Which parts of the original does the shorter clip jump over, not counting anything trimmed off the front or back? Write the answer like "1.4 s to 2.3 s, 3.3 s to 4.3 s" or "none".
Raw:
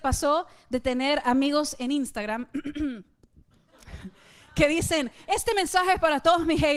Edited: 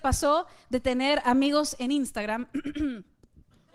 none